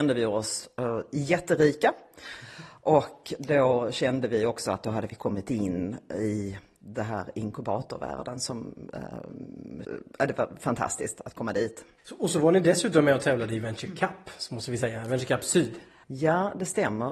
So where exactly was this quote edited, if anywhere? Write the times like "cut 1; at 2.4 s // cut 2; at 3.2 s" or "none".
cut 1; at 9.8 s